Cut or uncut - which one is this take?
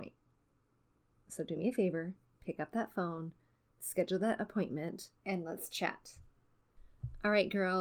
cut